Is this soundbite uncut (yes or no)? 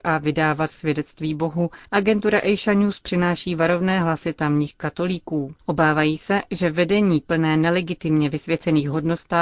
no